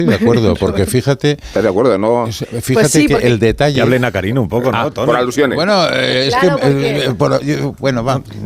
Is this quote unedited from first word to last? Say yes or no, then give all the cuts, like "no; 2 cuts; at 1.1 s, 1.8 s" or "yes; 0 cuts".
yes; 0 cuts